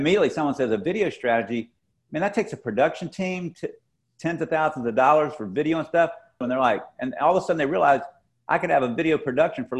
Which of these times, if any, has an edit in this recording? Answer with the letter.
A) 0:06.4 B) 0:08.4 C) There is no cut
A